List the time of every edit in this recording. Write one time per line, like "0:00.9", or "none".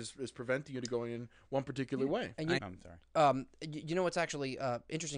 0:02.6